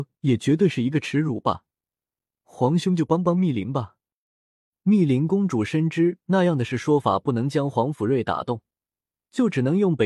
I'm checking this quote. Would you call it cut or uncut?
cut